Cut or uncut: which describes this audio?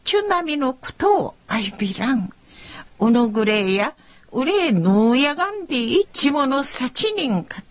cut